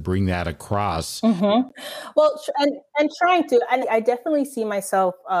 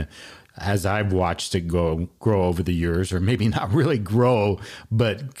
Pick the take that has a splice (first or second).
first